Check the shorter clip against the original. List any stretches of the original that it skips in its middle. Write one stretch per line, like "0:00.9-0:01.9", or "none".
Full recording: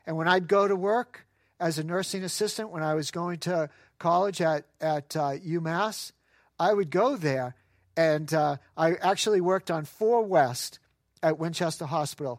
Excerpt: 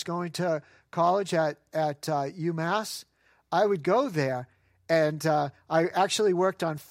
none